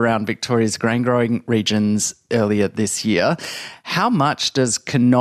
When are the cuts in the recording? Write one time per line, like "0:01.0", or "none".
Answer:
none